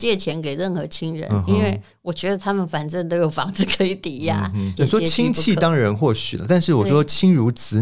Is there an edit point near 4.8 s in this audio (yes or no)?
yes